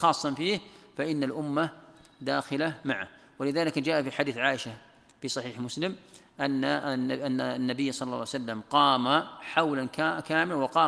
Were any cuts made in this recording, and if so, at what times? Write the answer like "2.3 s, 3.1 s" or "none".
none

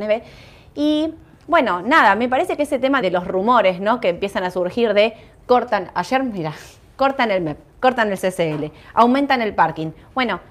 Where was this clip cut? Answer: 3.0 s

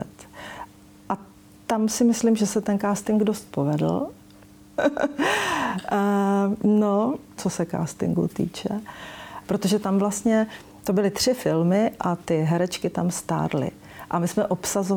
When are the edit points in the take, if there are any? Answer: 4.8 s, 7.4 s, 9.4 s

